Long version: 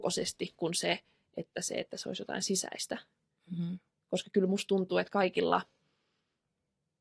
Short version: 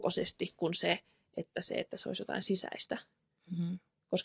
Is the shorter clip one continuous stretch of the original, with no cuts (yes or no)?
yes